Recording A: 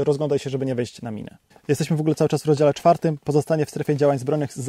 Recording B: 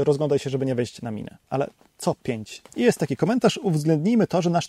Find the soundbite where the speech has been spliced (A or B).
B